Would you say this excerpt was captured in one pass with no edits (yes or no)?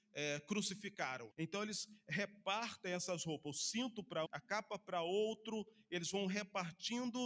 no